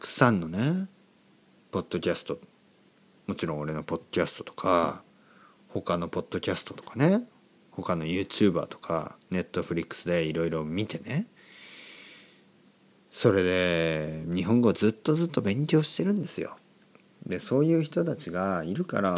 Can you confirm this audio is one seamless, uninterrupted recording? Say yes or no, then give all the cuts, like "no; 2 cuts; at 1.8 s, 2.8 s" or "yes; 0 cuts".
yes; 0 cuts